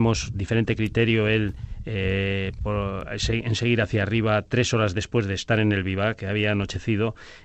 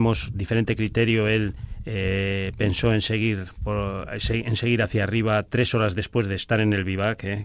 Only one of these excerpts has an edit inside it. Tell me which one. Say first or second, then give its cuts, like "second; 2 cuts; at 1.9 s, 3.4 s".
first; 2 cuts; at 2.6 s, 6.2 s